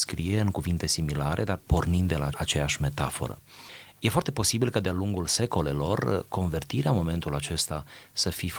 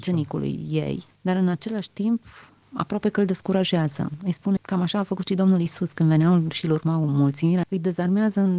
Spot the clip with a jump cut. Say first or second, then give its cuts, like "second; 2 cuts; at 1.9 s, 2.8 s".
second; 2 cuts; at 4.6 s, 7.6 s